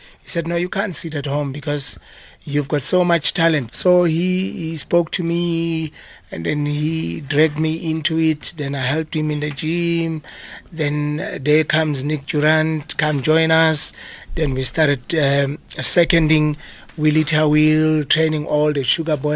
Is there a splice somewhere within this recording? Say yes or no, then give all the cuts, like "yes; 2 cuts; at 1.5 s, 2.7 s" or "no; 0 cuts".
yes; 1 cut; at 3.7 s